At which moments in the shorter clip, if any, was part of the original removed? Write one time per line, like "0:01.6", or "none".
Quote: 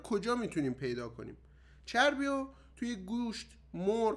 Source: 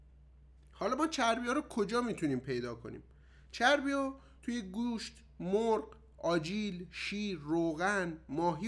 none